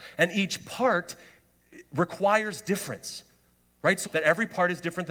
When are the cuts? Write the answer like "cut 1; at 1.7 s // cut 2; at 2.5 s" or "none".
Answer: cut 1; at 4.0 s